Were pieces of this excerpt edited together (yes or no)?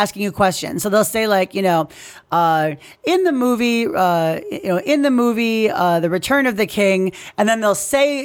no